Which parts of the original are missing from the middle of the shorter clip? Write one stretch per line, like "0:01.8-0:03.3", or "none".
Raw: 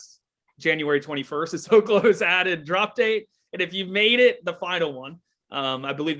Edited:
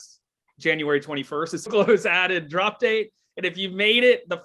0:01.7-0:01.8